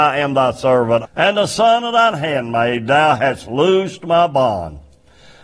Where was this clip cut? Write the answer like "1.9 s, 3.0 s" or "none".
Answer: 1.0 s

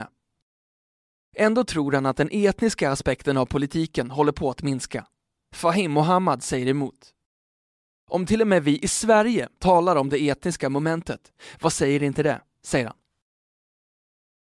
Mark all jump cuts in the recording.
9.6 s

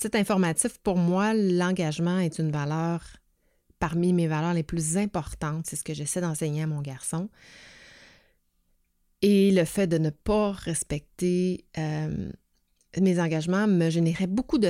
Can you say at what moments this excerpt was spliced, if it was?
none

